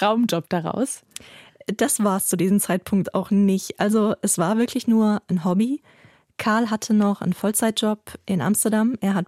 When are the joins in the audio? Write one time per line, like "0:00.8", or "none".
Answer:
none